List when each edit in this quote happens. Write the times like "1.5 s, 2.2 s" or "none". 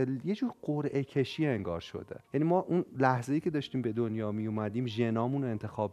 2.2 s